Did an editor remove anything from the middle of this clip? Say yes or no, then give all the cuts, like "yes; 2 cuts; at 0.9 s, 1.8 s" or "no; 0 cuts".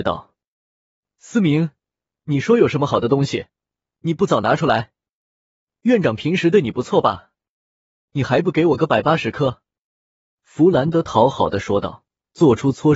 no; 0 cuts